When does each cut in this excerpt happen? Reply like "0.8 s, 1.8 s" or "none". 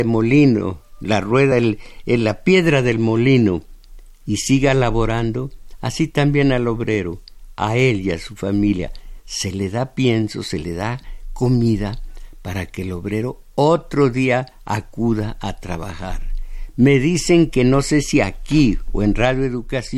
none

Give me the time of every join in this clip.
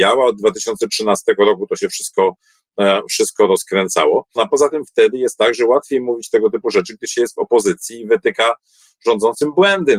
4.4 s

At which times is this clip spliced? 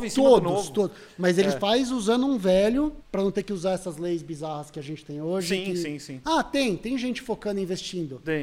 3.0 s, 6.2 s

